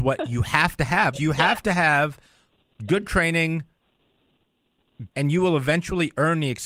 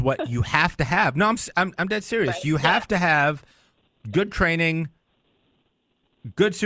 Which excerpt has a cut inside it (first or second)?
first